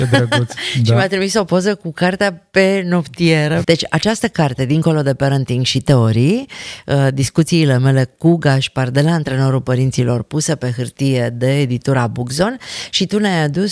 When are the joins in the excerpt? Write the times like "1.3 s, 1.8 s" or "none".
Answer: 3.6 s

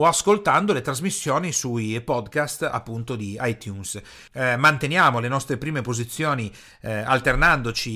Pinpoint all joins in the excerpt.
4.3 s

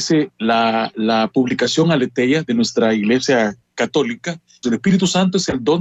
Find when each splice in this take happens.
4.6 s

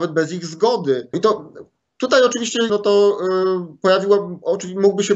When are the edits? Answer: 1.1 s, 2.7 s

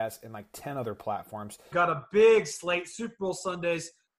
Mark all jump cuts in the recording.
1.7 s

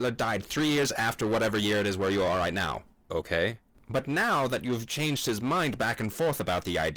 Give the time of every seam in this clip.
none

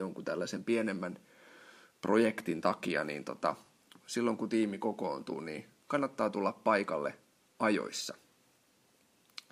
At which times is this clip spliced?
none

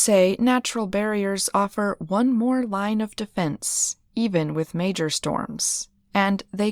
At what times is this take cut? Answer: none

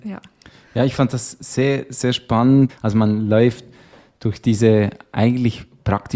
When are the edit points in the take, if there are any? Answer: 2.7 s

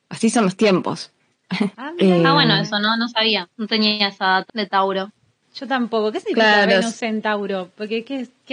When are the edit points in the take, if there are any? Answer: 4.5 s

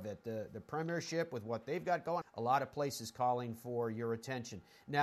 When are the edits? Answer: 2.2 s

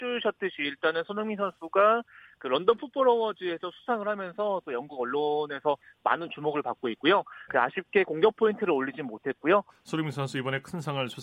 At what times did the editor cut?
7.5 s, 9.7 s

